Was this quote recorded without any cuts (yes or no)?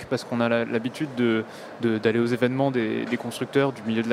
yes